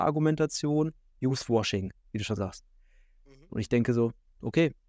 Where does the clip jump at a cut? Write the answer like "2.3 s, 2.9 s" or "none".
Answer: 3.5 s